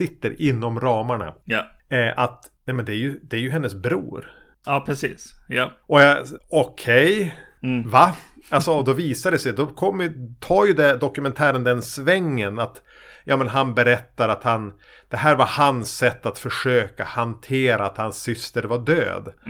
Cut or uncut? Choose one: cut